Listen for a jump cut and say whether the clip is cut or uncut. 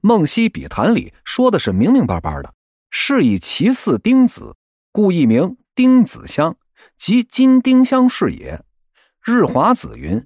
cut